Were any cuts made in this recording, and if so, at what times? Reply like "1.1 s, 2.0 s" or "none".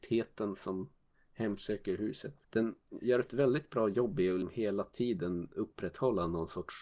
2.4 s